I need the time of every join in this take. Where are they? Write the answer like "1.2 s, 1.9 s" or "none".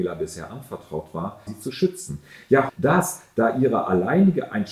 1.5 s, 2.7 s